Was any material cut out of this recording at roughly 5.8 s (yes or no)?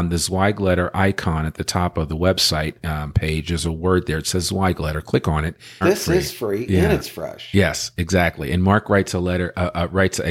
yes